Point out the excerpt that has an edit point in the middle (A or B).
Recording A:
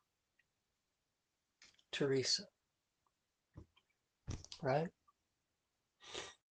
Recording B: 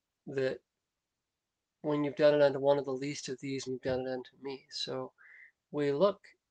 B